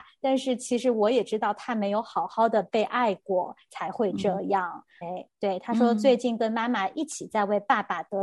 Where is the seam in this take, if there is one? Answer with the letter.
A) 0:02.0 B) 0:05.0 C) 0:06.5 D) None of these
B